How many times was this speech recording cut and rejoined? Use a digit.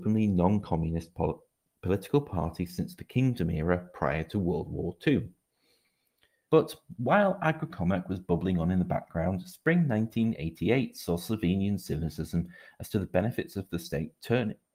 1